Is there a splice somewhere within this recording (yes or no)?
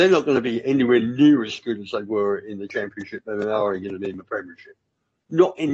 no